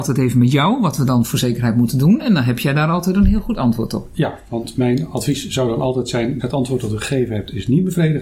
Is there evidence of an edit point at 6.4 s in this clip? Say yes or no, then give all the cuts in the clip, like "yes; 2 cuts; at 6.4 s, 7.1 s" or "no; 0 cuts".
yes; 1 cut; at 6.4 s